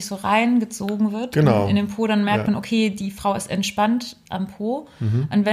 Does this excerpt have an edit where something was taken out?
no; 0 cuts

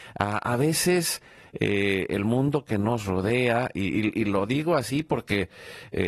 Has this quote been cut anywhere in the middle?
no; 0 cuts

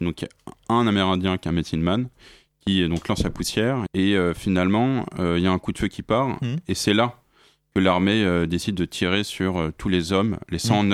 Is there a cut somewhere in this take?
yes; 1 cut; at 3.9 s

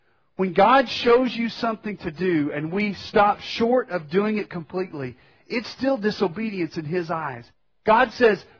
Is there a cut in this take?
no; 0 cuts

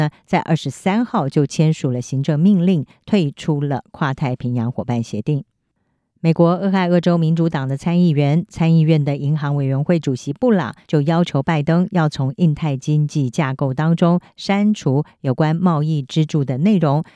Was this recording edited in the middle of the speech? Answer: yes; 1 cut; at 10.8 s

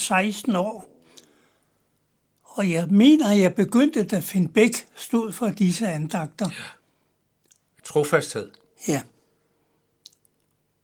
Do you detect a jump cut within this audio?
yes; 1 cut; at 7.8 s

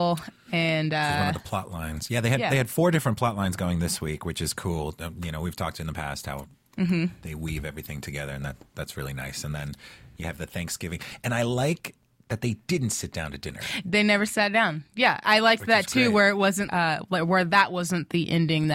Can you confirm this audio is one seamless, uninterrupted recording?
no; 1 cut; at 16.7 s

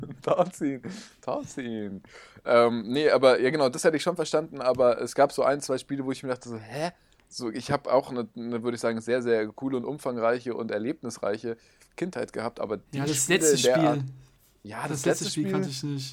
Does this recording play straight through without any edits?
yes; 0 cuts

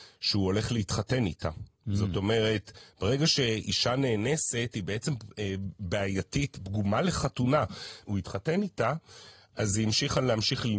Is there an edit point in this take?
yes; 1 cut; at 8.1 s

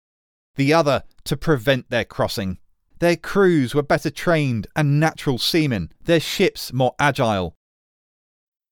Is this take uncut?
no; 2 cuts; at 2.9 s, 6.0 s

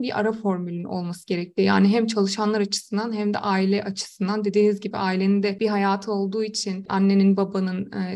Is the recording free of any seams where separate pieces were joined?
yes; 0 cuts

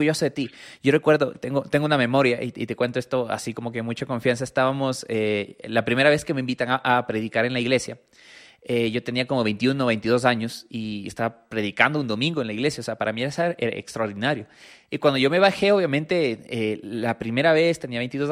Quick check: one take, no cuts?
yes; 0 cuts

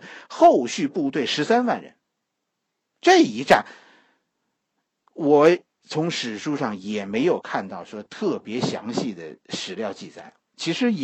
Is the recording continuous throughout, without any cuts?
yes; 0 cuts

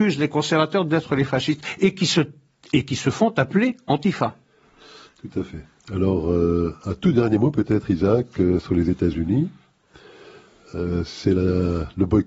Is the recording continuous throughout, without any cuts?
yes; 0 cuts

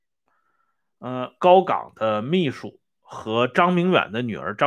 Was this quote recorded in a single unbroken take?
no; 1 cut; at 1.4 s

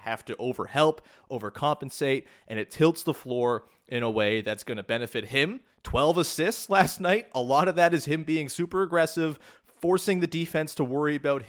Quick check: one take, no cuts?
yes; 0 cuts

